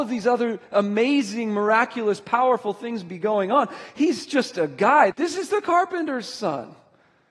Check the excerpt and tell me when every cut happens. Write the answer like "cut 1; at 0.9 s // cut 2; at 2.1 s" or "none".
cut 1; at 5.1 s